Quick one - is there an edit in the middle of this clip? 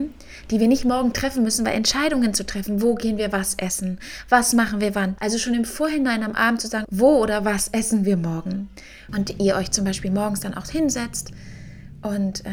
yes; 3 cuts; at 5.2 s, 6.8 s, 9.1 s

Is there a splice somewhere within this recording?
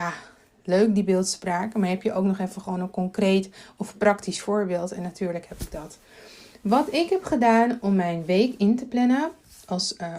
no; 0 cuts

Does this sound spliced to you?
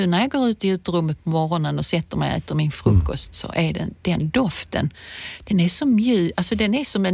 no; 0 cuts

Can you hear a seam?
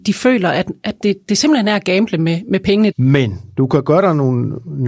yes; 1 cut; at 2.9 s

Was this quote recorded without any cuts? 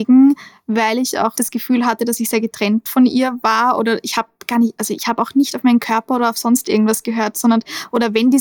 no; 1 cut; at 1.4 s

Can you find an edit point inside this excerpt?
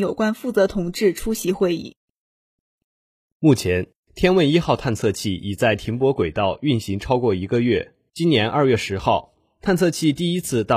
yes; 1 cut; at 8.1 s

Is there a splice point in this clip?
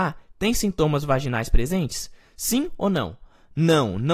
no; 0 cuts

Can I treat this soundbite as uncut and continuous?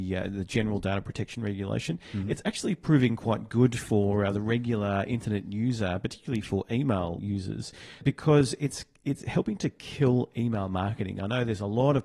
yes; 0 cuts

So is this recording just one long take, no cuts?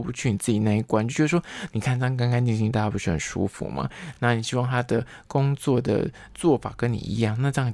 yes; 0 cuts

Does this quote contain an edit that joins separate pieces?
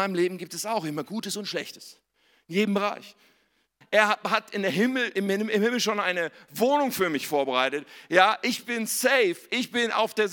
yes; 1 cut; at 3.8 s

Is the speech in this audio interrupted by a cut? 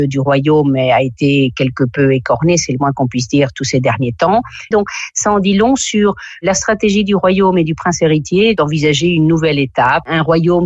yes; 1 cut; at 4.7 s

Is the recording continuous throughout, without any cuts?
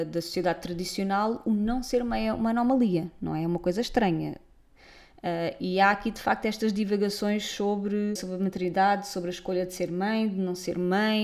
no; 1 cut; at 8.2 s

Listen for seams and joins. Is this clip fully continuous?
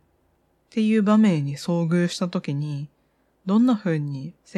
yes; 0 cuts

